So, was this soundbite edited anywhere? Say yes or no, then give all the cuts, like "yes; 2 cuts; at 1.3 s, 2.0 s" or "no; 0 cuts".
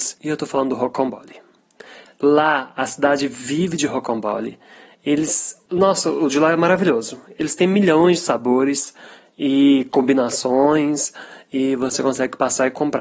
no; 0 cuts